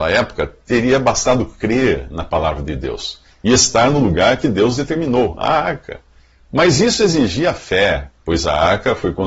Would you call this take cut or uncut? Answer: uncut